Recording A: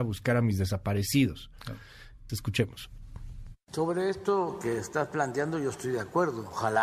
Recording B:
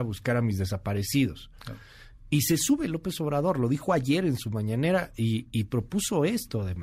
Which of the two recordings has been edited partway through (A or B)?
A